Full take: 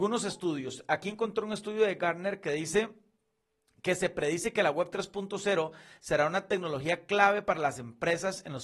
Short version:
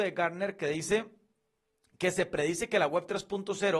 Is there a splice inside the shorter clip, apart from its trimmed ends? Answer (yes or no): no